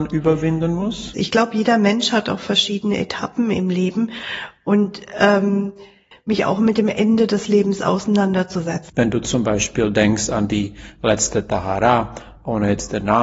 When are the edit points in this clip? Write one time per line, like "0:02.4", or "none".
0:01.1
0:06.1
0:08.9